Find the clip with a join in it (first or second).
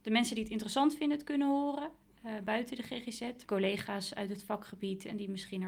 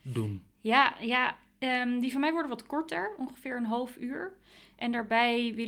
first